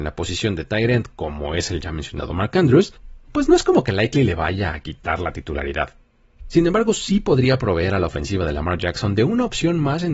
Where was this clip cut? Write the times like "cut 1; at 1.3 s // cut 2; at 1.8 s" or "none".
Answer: none